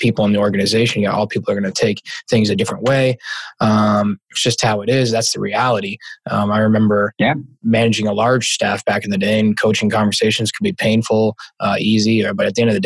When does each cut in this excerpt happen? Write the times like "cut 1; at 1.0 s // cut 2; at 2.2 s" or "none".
none